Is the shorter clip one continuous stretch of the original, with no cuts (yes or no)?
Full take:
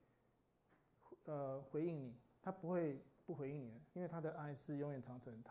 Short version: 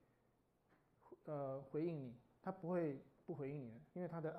yes